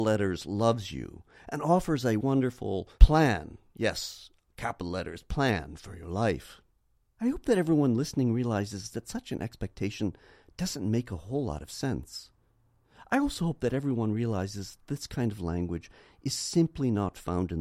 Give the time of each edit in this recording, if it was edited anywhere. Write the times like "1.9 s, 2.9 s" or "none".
2.9 s, 7.2 s